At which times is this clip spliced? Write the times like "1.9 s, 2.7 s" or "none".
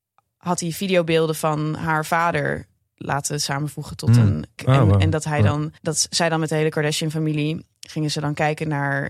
4.6 s, 5.8 s